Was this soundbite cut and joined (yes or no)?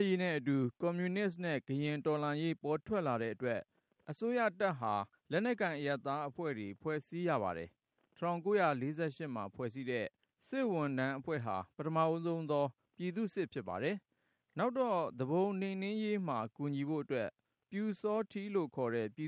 no